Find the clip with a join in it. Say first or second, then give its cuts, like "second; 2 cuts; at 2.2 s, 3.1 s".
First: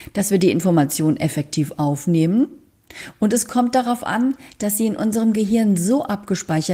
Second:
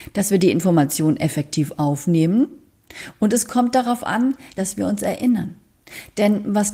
second; 1 cut; at 4.6 s